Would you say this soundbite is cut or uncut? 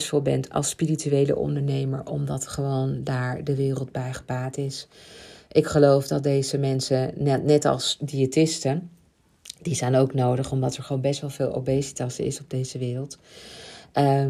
uncut